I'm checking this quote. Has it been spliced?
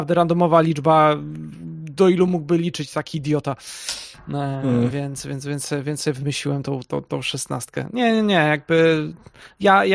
no; 0 cuts

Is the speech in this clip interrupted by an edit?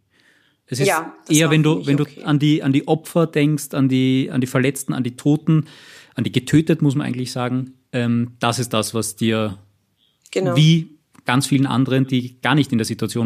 no; 0 cuts

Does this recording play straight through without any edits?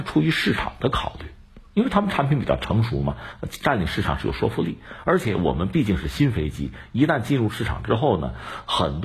yes; 0 cuts

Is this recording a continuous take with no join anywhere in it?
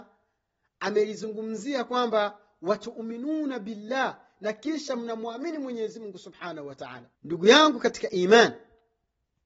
no; 1 cut; at 7.2 s

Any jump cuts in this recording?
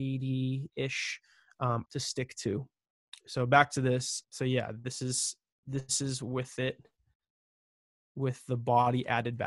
yes; 2 cuts; at 1.8 s, 4.2 s

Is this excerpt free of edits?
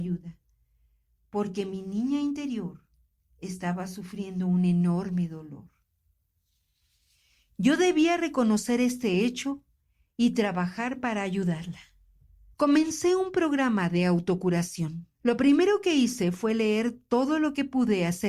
no; 2 cuts; at 12.5 s, 15.1 s

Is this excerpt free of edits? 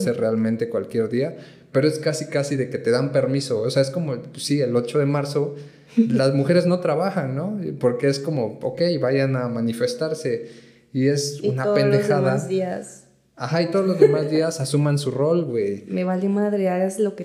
yes; 0 cuts

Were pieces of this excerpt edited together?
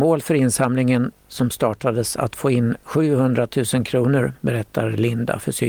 yes; 1 cut; at 4.4 s

